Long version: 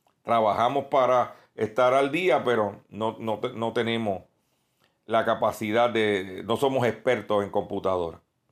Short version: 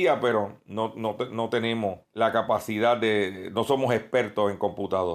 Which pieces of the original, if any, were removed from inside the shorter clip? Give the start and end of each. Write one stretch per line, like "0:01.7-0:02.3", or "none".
0:04.3-0:05.0